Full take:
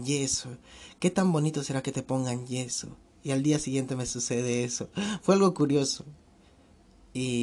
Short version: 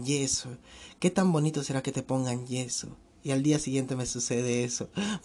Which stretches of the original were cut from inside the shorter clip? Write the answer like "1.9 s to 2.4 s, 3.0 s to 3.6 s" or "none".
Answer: none